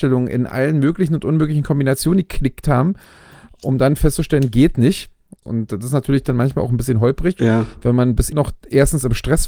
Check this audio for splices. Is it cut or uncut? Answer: cut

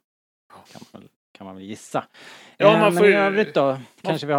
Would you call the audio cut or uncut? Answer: uncut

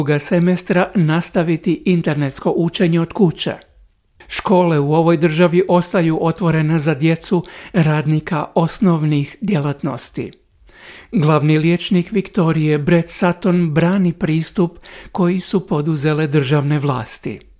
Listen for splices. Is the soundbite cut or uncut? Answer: uncut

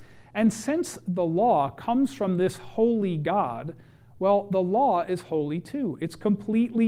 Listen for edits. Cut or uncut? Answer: uncut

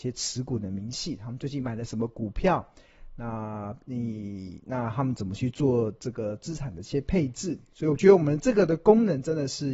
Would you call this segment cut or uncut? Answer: uncut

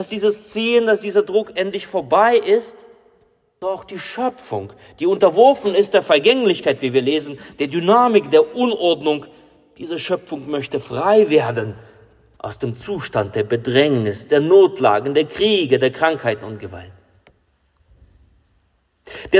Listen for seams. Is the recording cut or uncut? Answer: cut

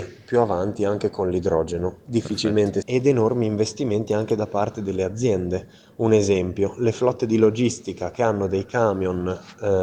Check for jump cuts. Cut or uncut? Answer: cut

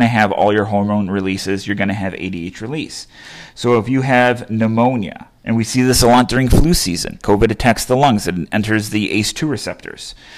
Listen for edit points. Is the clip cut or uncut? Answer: cut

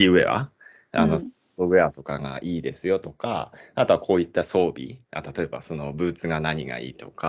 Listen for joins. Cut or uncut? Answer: uncut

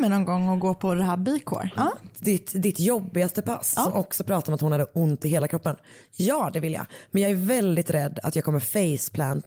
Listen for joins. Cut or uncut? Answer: cut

